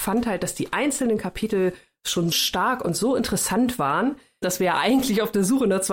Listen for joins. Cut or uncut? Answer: cut